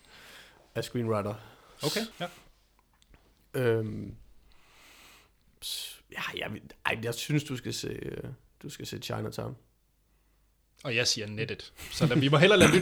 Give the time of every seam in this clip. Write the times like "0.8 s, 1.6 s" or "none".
2.1 s

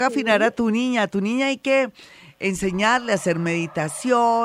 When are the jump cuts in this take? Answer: none

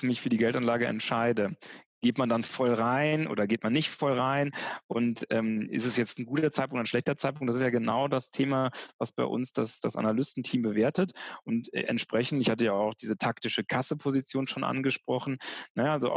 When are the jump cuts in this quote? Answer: none

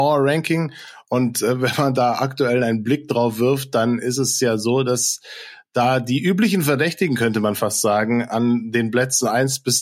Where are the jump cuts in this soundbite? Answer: none

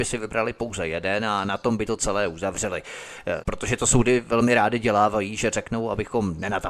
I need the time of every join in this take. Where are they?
3.4 s

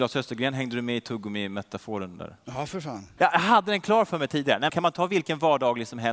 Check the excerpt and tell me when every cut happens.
3.2 s, 4.7 s

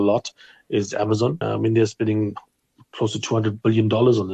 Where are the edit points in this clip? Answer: 1.4 s

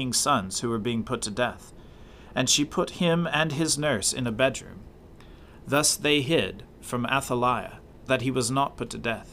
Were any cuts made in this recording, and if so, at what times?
8.1 s

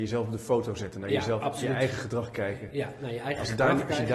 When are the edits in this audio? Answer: none

